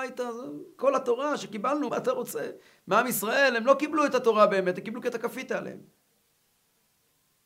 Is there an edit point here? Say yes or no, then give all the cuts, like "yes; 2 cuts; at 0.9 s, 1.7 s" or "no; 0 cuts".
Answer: yes; 1 cut; at 1.9 s